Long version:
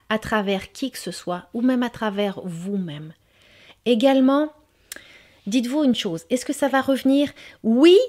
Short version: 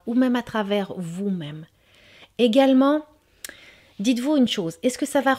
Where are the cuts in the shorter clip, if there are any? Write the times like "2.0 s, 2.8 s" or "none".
none